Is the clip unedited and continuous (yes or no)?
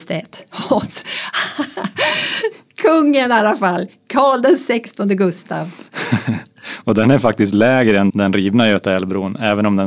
no